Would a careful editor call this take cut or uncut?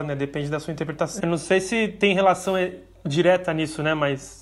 cut